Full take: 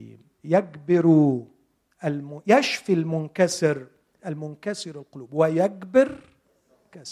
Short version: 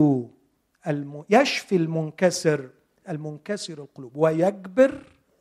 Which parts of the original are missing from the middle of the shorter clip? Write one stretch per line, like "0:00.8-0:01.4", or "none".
none